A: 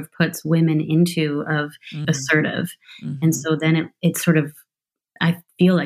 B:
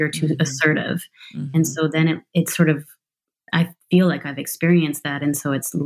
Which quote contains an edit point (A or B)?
A